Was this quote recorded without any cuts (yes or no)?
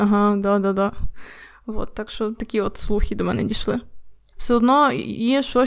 no